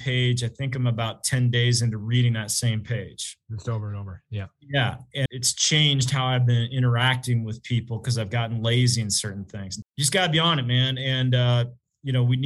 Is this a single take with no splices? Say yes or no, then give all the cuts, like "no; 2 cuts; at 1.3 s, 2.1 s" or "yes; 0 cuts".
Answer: no; 2 cuts; at 5.3 s, 9.8 s